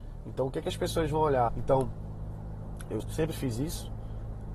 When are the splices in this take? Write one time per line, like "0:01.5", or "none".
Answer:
0:01.5
0:03.0